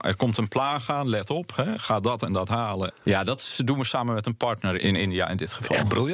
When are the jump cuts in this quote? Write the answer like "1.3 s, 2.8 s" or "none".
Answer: 2.9 s, 4.8 s

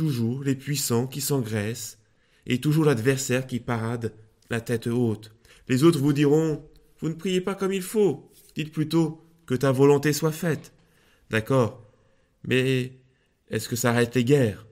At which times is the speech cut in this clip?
5.5 s

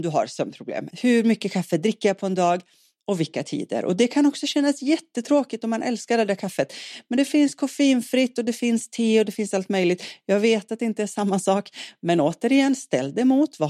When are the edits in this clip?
0.9 s

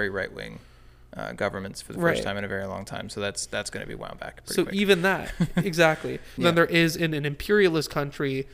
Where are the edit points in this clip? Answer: 6.4 s

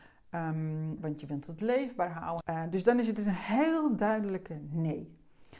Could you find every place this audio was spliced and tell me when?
1.0 s, 2.4 s

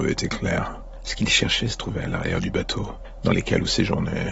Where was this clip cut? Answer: none

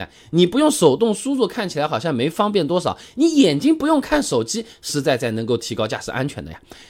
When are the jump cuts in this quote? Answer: 4.9 s

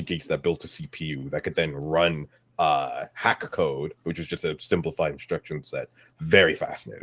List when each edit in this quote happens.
6.1 s

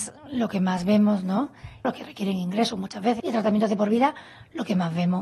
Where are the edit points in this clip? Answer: 1.8 s, 3.2 s

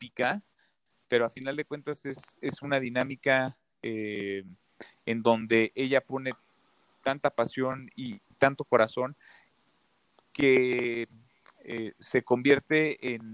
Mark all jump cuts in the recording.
none

